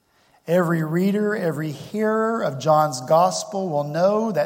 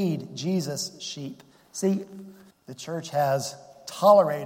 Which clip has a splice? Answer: second; 1 cut; at 2.5 s

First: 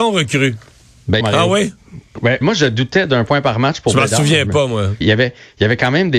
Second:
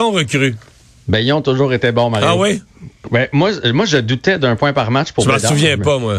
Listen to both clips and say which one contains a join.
first; 3 cuts; at 1.2 s, 2.4 s, 5.0 s

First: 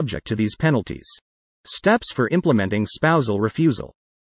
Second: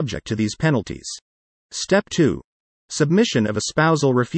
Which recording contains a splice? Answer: first; 1 cut; at 1.4 s

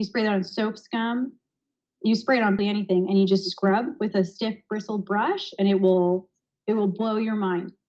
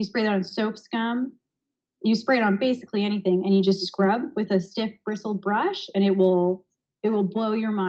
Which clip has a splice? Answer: first; 1 cut; at 2.6 s

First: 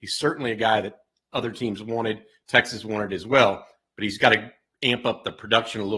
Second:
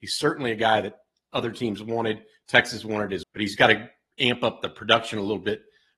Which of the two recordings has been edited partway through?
second; 1 cut; at 3.2 s

